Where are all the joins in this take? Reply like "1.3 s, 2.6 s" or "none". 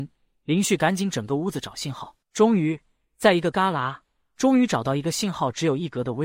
2.2 s